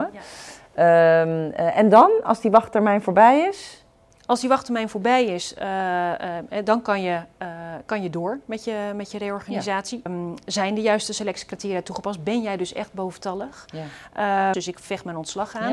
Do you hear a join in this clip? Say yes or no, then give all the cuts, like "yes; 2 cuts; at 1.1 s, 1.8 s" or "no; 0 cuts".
yes; 2 cuts; at 10.1 s, 14.5 s